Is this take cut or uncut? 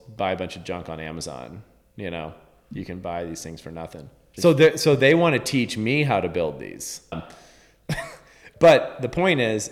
cut